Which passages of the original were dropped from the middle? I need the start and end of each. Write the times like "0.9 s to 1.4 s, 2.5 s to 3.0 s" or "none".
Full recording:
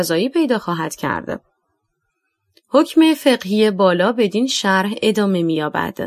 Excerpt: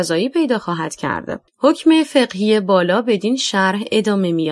1.5 s to 2.6 s